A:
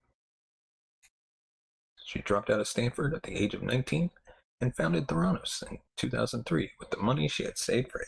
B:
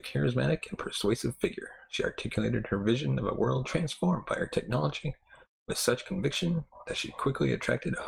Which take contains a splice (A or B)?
A